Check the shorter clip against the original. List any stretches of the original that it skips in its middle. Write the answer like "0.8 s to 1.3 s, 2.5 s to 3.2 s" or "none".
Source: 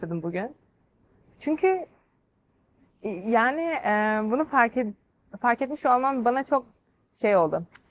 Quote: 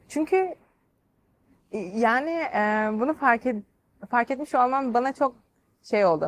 none

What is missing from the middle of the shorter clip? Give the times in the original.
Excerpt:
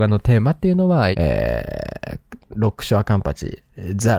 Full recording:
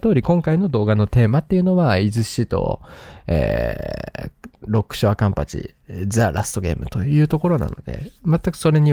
2.0 s to 3.2 s

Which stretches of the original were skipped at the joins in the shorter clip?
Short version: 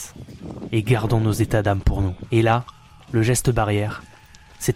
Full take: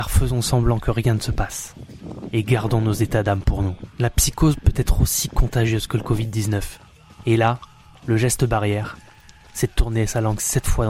3.9 s to 7.2 s

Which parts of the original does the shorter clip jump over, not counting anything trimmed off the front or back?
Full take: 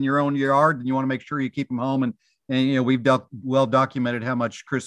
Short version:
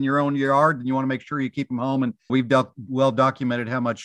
2.3 s to 2.8 s

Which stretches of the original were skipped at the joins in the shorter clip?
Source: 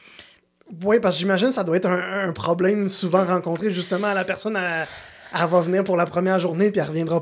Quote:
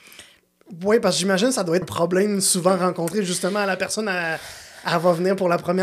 1.8 s to 2.3 s

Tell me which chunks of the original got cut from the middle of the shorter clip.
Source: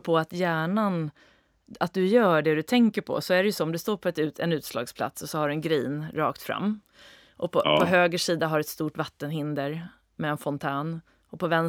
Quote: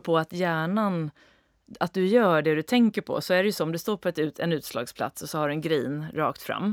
none

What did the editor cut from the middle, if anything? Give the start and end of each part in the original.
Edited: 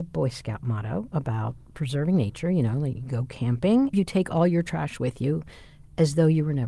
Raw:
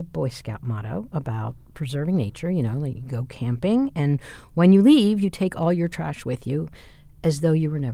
3.9 s to 5.2 s

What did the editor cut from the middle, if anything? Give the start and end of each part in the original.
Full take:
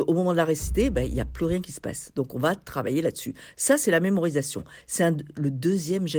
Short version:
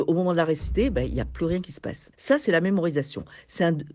2.1 s to 3.5 s

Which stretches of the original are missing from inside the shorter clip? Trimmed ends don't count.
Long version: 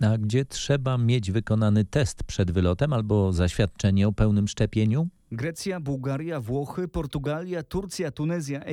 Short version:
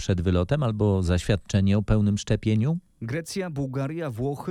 none

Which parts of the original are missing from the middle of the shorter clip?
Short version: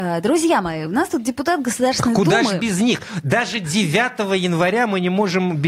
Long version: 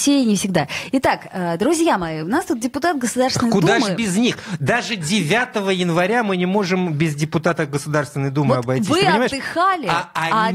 none

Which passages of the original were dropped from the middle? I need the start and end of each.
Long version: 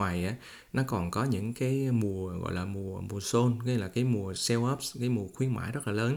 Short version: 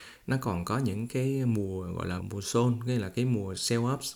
2.7 s to 3.0 s

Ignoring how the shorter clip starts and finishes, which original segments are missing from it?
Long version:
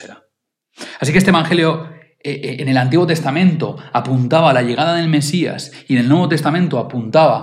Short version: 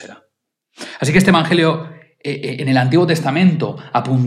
none

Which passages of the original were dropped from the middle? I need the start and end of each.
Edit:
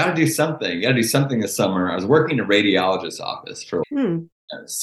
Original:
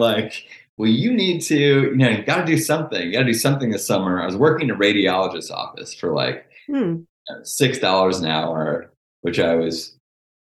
6.1 s to 6.6 s

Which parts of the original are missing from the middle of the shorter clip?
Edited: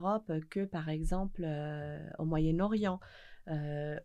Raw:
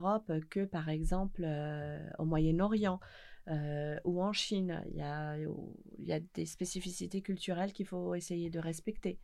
none

